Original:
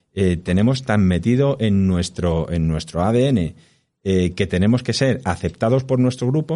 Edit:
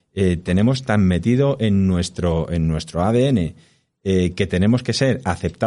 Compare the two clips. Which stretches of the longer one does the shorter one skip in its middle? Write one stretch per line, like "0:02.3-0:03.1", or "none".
none